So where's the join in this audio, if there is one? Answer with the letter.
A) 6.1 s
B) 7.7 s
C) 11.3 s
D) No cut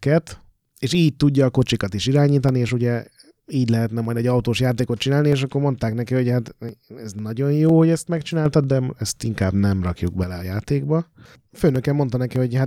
D